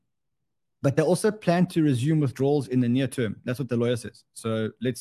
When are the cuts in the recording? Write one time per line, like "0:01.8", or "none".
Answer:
none